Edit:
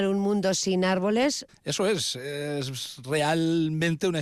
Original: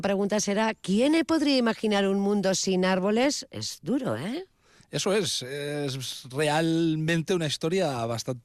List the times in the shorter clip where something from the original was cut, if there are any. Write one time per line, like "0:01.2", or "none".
0:01.5